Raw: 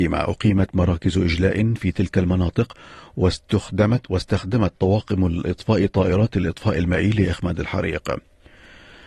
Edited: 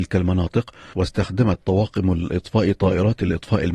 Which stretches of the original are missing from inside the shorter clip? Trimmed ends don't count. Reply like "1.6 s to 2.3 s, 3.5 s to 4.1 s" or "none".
3.0 s to 4.1 s